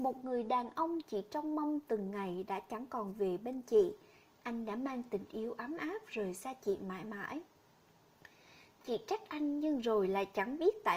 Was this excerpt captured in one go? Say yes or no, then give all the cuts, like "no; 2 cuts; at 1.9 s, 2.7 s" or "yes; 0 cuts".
yes; 0 cuts